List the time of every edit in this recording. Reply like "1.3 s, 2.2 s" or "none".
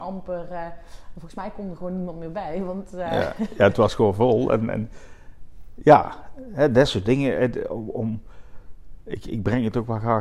none